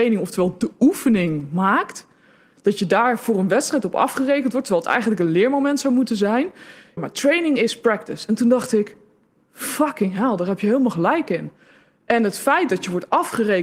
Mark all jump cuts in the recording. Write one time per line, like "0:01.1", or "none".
0:07.0